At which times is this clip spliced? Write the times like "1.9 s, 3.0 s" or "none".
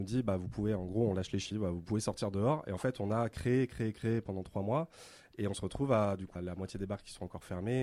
1.5 s, 6.3 s